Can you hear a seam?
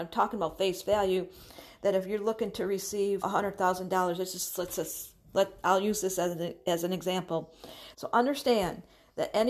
yes; 2 cuts; at 3.2 s, 7.9 s

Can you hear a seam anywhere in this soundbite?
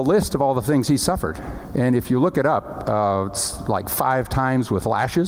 no; 0 cuts

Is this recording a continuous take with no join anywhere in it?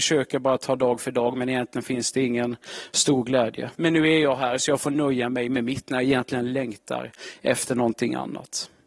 no; 1 cut; at 3.7 s

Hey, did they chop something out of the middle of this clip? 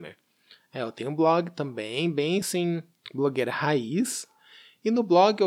no; 0 cuts

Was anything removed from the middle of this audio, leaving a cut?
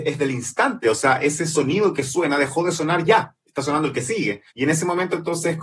yes; 1 cut; at 4.5 s

